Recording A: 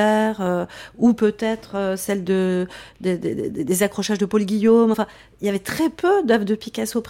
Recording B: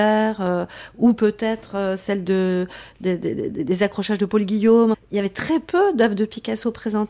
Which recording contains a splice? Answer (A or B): B